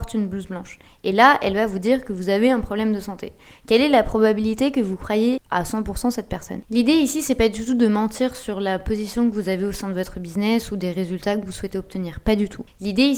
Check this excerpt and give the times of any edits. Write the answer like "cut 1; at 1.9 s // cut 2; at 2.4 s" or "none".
none